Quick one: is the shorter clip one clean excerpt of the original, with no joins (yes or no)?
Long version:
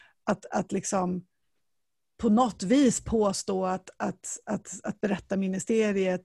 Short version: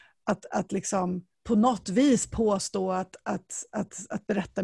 no